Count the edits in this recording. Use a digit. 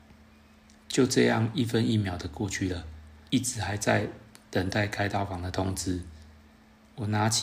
1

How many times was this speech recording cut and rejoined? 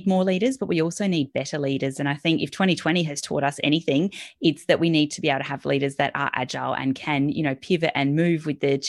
0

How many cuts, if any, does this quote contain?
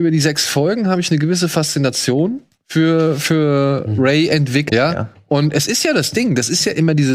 1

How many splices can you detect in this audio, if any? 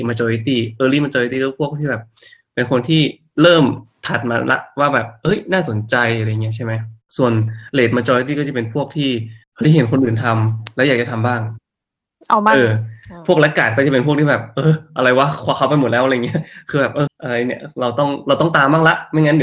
1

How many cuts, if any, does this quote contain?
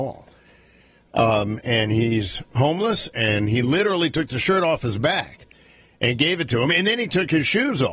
1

